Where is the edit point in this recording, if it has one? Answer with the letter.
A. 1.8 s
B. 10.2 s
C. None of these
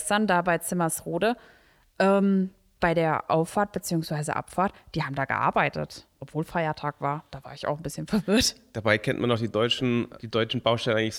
B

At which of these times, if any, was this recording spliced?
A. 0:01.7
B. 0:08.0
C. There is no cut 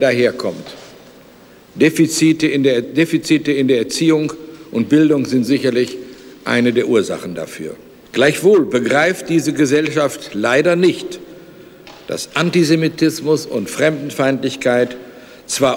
B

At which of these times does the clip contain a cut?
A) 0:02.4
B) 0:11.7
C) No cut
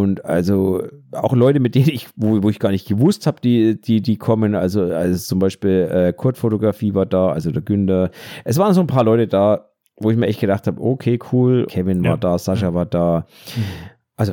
B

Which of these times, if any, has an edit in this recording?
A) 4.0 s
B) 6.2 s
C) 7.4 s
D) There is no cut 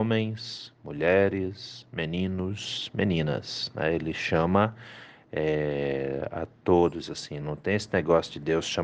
C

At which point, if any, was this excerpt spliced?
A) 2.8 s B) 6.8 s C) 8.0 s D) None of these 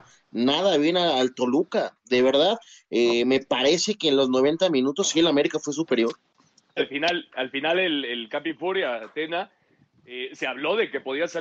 B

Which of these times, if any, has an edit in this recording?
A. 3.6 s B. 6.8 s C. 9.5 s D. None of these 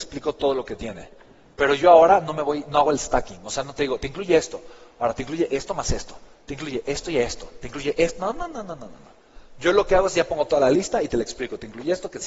B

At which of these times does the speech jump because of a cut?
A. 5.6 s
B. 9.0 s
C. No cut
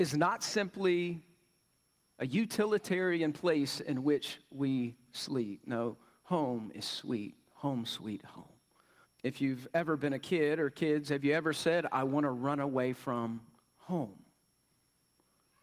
B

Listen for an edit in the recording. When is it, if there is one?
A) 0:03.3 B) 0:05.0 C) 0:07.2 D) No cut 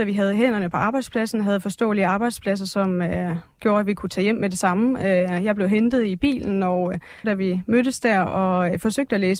C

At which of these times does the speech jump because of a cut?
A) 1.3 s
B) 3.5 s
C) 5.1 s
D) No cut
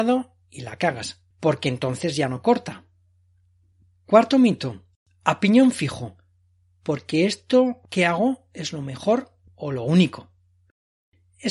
A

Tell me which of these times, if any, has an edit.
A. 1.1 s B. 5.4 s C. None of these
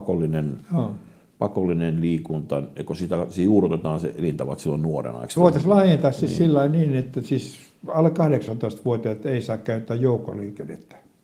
B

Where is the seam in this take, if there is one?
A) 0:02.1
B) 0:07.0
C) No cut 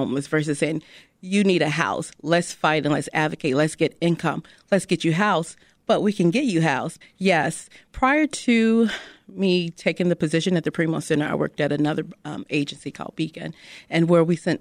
B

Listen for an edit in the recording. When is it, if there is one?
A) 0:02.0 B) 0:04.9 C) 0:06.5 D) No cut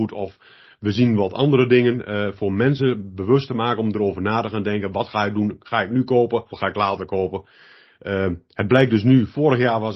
C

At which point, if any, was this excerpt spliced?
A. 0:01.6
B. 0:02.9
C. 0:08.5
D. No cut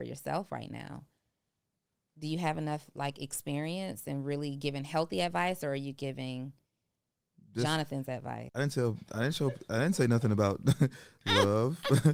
C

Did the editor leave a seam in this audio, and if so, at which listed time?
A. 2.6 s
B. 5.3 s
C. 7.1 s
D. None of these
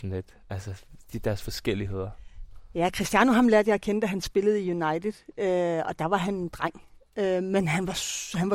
D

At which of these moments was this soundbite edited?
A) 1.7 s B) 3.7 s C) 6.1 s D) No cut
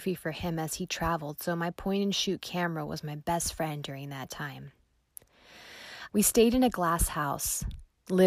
C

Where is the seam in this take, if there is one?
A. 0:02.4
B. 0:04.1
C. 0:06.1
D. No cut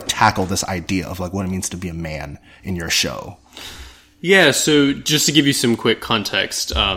D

